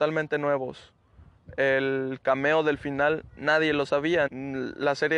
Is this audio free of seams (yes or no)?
no